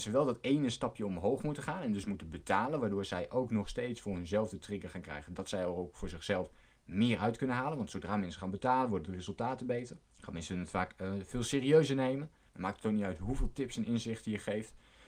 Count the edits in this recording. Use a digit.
2